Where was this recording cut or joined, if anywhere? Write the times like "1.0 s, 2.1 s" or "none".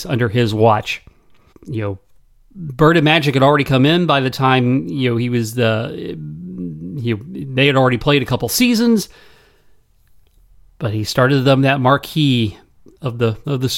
1.5 s